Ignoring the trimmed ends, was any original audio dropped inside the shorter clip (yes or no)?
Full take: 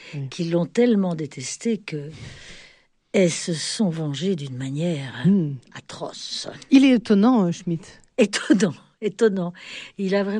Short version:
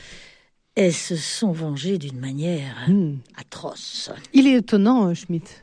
no